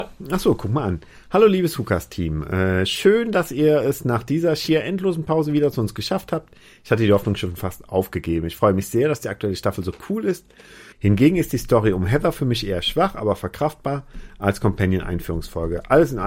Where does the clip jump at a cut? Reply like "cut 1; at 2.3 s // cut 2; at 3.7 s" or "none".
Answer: cut 1; at 10.9 s